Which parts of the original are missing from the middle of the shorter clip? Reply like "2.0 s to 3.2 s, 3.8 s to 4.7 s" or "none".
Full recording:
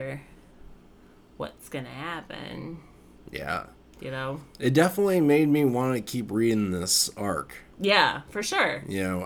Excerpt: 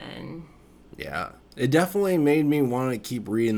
3.9 s to 4.5 s